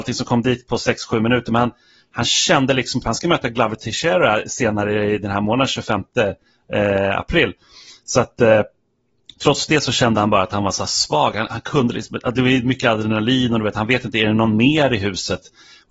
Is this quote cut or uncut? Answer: cut